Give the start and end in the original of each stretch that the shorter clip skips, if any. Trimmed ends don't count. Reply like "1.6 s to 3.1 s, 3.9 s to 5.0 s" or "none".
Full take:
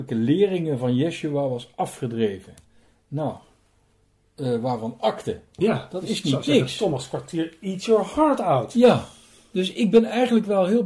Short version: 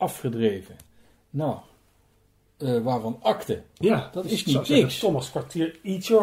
none